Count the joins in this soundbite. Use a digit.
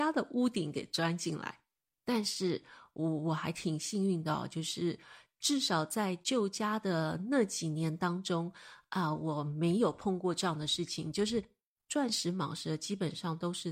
0